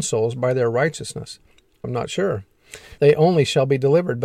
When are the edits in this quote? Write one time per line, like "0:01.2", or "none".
0:01.8
0:03.0